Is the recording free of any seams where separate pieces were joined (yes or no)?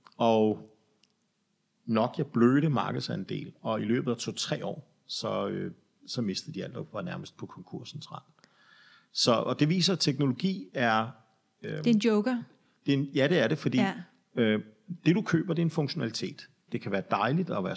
no